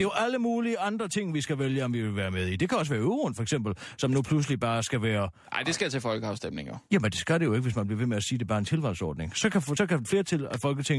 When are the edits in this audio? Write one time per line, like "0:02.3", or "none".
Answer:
none